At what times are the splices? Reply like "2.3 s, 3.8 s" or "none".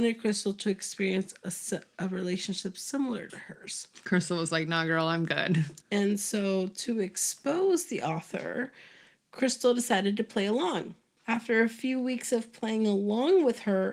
5.8 s, 11.2 s